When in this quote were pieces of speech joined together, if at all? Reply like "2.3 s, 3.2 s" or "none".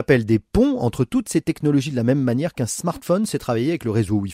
none